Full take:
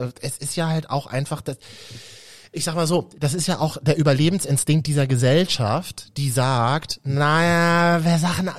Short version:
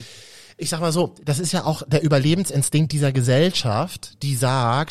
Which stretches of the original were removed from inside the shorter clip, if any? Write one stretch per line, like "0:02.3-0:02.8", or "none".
none